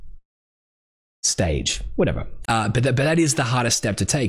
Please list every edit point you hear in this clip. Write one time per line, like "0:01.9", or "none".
0:02.4